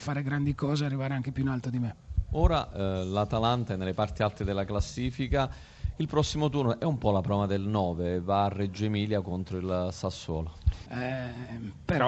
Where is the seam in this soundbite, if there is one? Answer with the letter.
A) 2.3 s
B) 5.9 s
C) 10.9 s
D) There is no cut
C